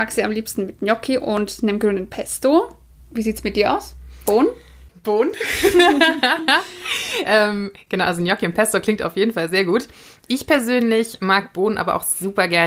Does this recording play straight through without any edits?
yes; 0 cuts

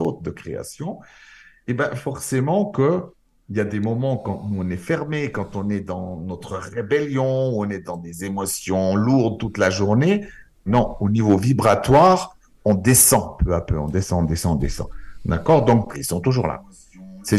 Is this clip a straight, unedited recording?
no; 2 cuts; at 10.7 s, 15.9 s

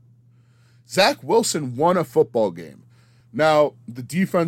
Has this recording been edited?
no; 0 cuts

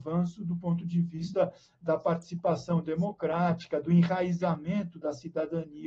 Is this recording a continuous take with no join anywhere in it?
yes; 0 cuts

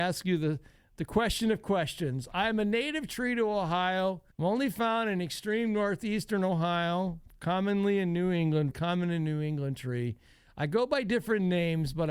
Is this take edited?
yes; 2 cuts; at 4.3 s, 8.7 s

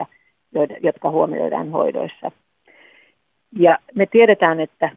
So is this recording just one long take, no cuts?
yes; 0 cuts

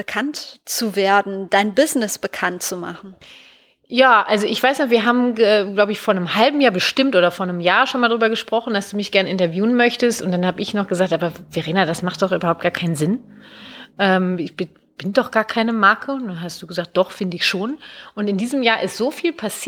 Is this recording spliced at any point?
no; 0 cuts

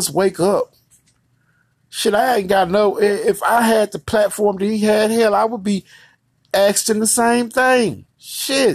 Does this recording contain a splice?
no; 0 cuts

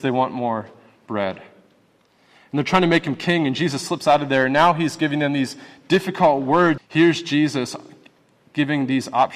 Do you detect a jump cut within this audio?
yes; 1 cut; at 6.8 s

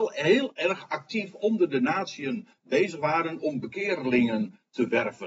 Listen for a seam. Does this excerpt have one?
no; 0 cuts

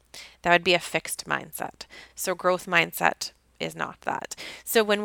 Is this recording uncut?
yes; 0 cuts

